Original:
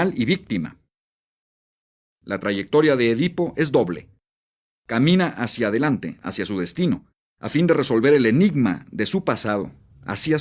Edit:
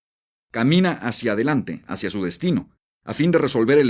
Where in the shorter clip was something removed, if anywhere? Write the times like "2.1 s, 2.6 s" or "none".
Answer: none